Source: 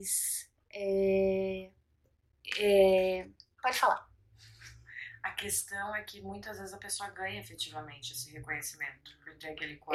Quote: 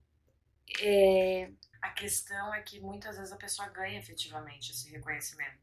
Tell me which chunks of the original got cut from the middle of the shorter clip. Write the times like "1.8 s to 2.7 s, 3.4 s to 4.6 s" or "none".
3.5 s to 5.1 s